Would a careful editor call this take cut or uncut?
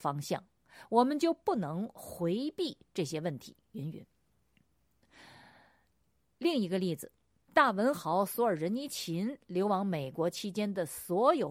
uncut